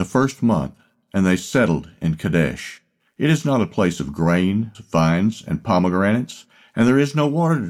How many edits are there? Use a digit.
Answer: 2